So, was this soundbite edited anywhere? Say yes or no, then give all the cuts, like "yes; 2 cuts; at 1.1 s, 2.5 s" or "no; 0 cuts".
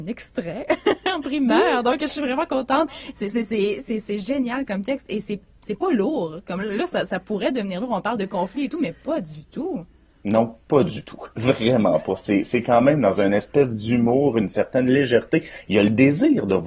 yes; 1 cut; at 3.1 s